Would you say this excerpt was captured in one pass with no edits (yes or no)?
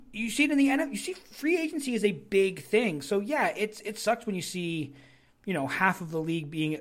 yes